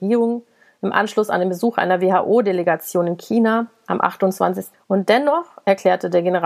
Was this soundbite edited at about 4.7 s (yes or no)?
yes